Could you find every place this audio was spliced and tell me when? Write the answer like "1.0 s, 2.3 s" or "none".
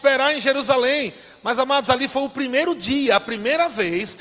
none